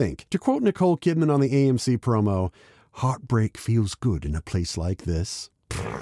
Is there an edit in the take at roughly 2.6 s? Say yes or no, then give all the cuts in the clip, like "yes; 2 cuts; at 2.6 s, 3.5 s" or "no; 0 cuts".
no; 0 cuts